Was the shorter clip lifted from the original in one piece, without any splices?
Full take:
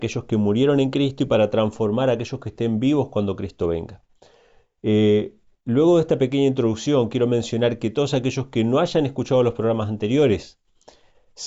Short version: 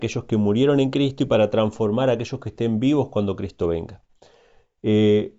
yes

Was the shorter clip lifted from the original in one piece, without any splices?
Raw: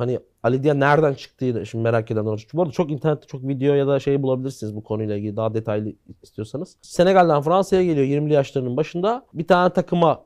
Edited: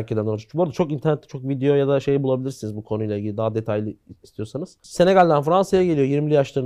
yes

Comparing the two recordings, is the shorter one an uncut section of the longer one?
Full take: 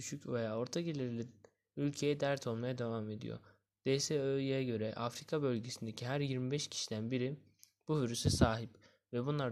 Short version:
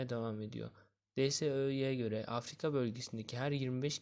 yes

